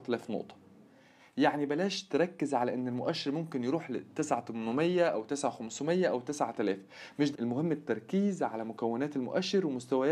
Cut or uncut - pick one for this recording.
cut